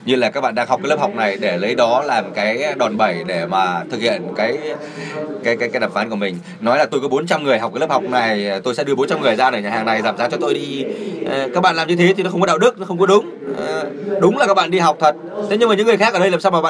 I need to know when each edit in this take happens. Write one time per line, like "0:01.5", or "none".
none